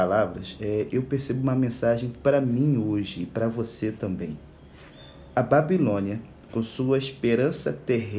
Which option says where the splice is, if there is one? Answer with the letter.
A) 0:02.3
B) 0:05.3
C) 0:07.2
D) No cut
D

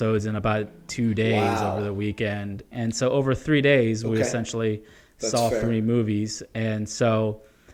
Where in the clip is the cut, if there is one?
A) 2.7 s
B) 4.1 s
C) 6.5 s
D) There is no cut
A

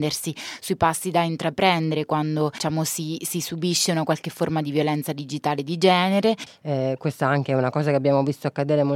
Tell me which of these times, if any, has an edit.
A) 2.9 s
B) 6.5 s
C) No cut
B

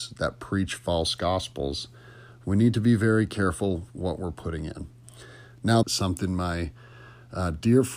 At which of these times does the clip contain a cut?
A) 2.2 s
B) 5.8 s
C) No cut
B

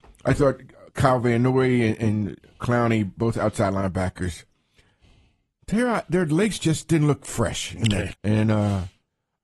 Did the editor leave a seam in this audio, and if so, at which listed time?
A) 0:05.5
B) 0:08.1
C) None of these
B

